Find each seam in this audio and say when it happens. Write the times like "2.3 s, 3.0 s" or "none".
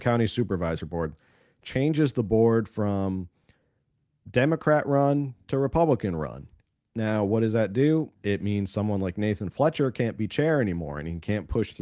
8.2 s